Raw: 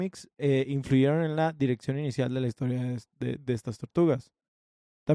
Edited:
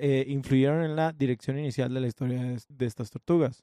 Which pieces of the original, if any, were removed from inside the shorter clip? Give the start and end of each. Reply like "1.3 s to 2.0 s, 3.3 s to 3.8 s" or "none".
3.1 s to 3.4 s